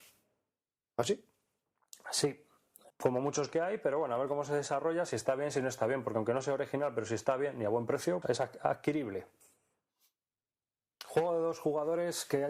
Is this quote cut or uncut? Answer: cut